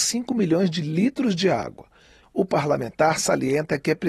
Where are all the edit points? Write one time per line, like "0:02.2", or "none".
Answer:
0:02.2

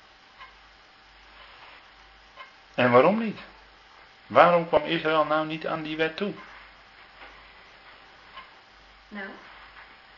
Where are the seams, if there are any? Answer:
none

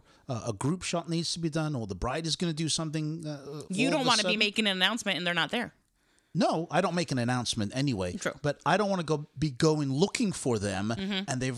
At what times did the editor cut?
none

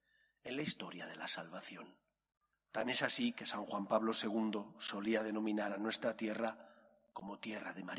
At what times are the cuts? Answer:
0:02.5

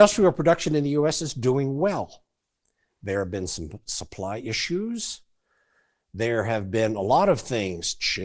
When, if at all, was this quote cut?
none

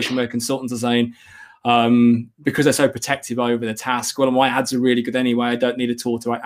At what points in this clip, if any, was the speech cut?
none

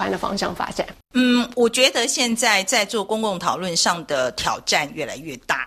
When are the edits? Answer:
none

